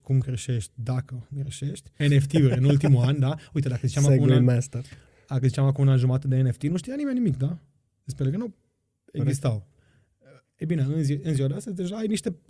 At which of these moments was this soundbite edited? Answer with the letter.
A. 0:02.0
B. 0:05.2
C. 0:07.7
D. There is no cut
A